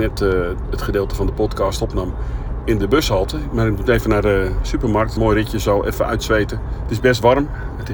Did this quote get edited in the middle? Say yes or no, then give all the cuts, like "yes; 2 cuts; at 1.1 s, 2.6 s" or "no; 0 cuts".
yes; 2 cuts; at 5.2 s, 6.9 s